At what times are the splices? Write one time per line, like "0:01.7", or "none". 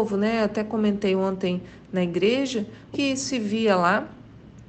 0:02.9